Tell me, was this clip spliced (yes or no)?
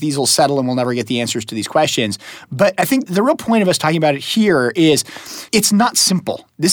yes